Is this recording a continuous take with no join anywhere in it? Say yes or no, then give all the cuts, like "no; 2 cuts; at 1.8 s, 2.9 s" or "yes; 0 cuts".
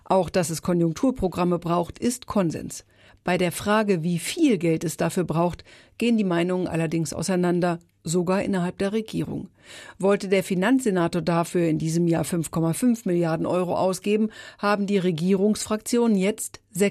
yes; 0 cuts